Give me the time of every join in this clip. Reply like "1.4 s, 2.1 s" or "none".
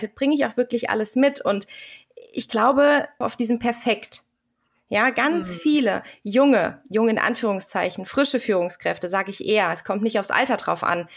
3.2 s